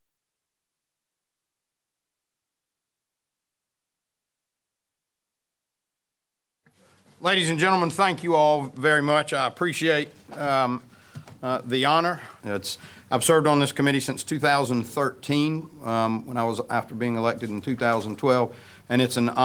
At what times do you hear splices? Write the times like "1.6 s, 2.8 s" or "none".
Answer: 12.4 s